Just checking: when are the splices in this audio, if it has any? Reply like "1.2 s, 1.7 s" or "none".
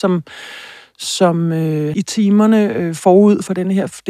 1.9 s